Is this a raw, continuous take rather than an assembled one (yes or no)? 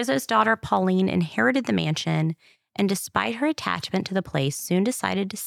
yes